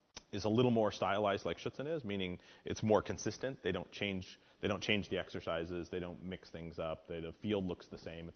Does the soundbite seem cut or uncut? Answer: uncut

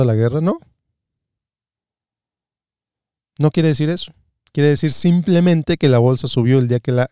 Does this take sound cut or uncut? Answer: uncut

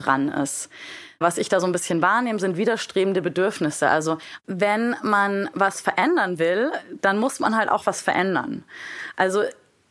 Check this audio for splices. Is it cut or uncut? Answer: uncut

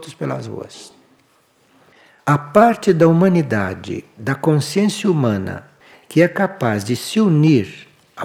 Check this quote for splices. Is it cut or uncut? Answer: uncut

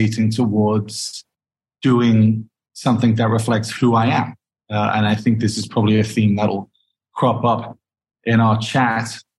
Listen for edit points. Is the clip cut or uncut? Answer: uncut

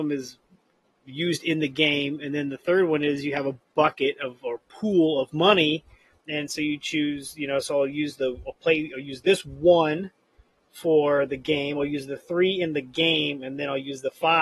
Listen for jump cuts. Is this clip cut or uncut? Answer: uncut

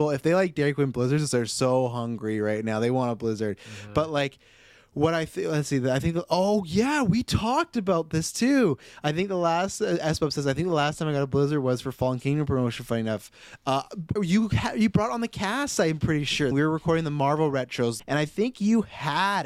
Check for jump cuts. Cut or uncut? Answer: cut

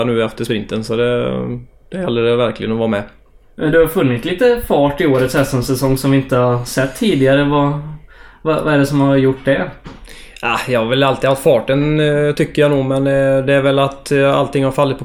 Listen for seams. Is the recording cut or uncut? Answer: uncut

